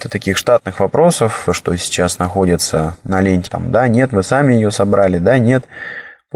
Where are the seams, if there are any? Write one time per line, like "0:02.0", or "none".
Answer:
0:01.5
0:03.5